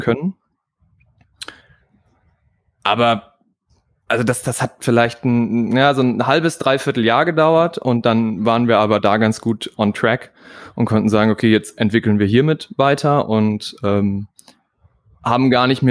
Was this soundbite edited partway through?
no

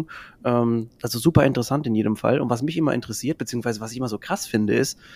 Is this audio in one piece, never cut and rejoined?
yes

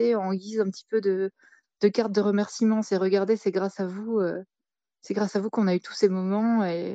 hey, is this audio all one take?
yes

